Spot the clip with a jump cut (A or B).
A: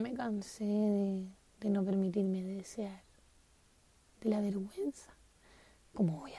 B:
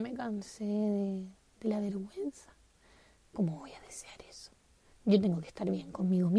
B